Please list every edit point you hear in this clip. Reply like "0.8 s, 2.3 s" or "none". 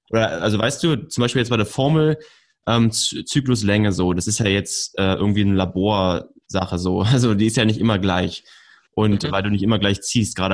none